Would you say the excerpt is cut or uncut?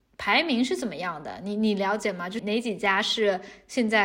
cut